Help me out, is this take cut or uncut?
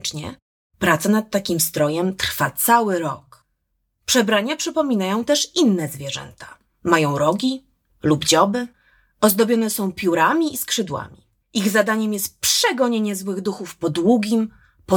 cut